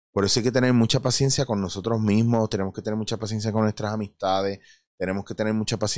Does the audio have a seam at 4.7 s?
no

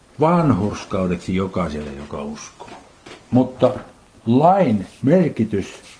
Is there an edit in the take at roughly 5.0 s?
no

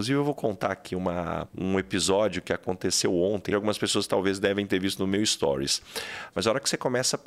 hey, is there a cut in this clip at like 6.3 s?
yes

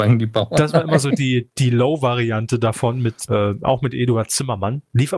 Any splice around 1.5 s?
no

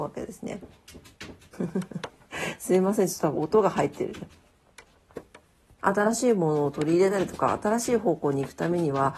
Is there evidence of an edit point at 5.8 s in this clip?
yes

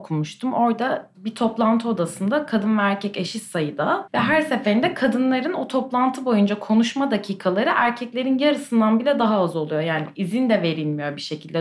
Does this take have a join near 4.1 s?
yes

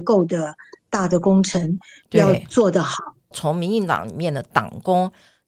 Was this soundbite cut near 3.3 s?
yes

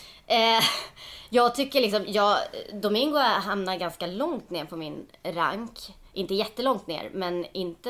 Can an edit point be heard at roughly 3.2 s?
no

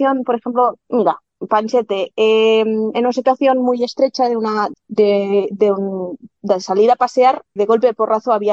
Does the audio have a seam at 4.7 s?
yes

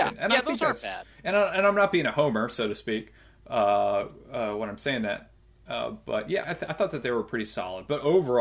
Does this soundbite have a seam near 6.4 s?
yes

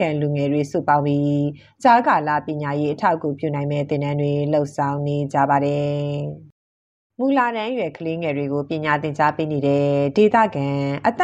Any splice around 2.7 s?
no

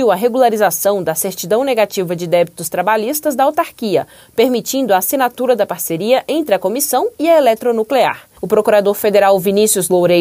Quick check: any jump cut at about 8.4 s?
yes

